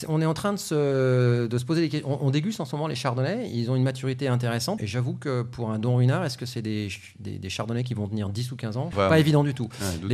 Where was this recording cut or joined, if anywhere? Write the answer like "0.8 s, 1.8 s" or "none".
4.8 s, 8.9 s